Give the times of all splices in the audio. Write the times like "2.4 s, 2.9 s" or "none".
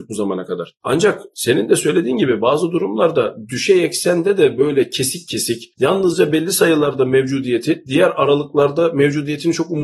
none

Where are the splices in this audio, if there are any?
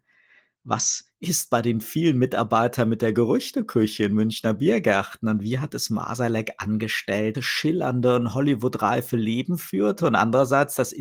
7.3 s

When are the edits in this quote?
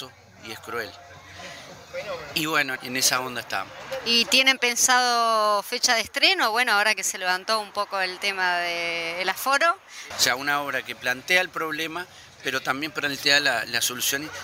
2.8 s, 10.1 s

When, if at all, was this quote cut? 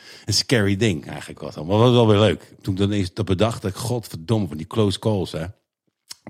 none

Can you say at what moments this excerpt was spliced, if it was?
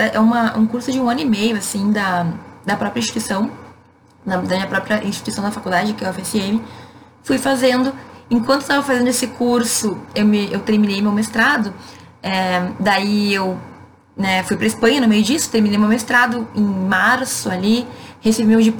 none

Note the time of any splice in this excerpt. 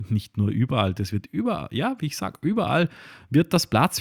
1.0 s

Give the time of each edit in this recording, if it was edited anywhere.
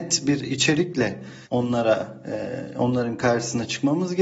1.4 s

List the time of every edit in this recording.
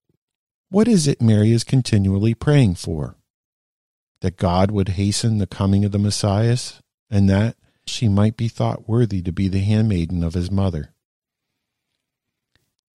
7.9 s

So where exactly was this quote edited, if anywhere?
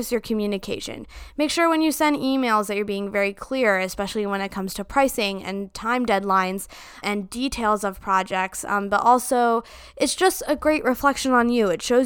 7.0 s

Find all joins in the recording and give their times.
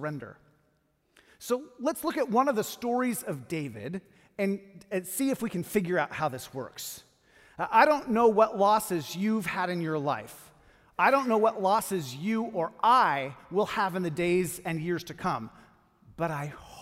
none

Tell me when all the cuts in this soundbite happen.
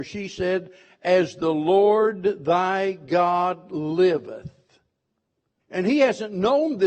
5.6 s

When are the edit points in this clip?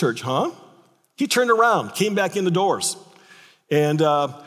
1.1 s

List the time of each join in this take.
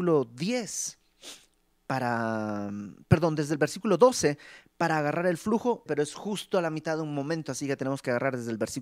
5.9 s

